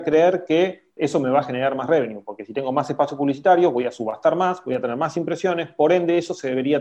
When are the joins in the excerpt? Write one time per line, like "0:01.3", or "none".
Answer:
0:01.0